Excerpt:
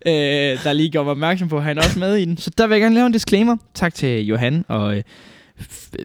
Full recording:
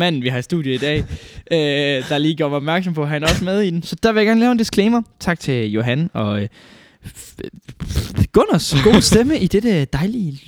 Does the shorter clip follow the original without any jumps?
yes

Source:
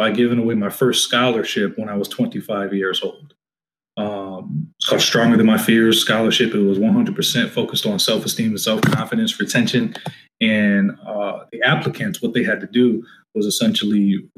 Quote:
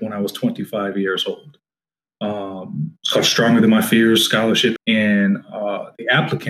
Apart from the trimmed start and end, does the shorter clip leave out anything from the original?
yes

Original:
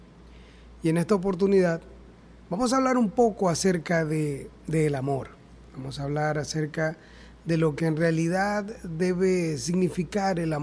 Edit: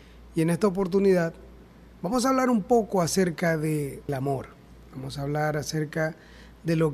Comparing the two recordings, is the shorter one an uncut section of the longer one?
no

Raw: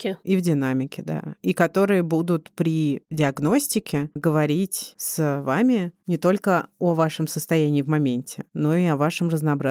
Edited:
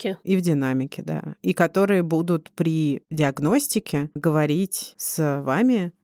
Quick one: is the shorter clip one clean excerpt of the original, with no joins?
yes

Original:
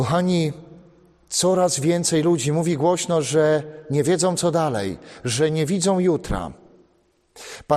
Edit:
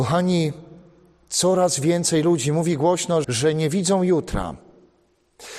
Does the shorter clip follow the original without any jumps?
no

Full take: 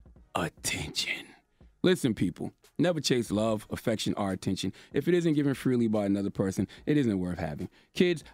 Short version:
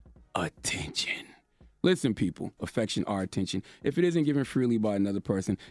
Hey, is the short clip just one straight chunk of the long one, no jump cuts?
no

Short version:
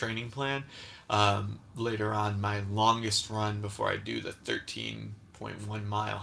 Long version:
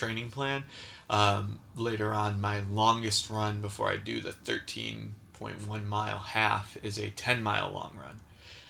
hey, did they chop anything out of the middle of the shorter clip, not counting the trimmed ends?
no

